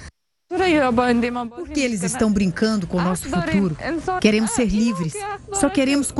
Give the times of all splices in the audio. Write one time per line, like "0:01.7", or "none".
0:04.2